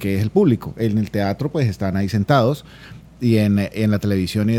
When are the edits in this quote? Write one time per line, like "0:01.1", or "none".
none

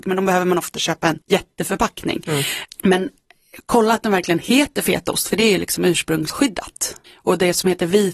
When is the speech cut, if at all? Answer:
0:01.2

